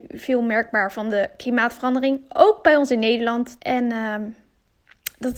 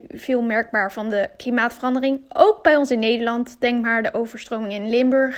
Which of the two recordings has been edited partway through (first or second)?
first